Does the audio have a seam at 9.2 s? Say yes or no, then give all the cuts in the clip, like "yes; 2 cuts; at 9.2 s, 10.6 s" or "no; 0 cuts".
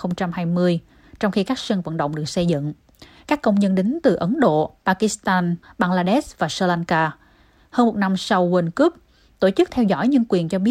no; 1 cut; at 5.6 s